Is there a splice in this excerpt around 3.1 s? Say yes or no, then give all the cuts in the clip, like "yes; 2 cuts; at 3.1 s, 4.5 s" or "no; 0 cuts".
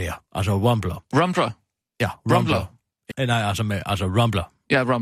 yes; 1 cut; at 3.1 s